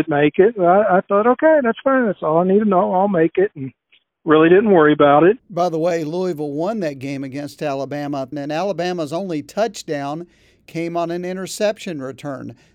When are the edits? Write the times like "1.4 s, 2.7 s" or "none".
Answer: 5.4 s, 8.3 s